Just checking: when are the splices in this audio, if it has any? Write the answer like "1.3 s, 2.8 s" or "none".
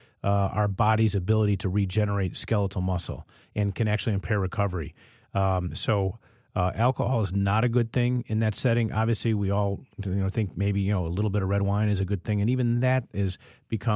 none